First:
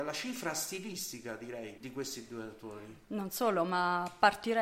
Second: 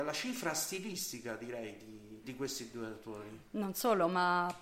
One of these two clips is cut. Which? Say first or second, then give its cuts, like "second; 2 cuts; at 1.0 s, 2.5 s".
first; 1 cut; at 1.8 s